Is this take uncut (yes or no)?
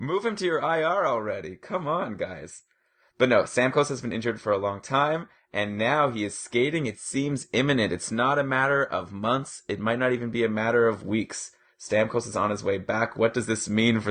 yes